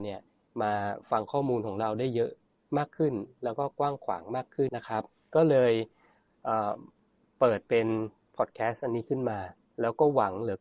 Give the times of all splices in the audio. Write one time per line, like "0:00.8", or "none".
0:04.7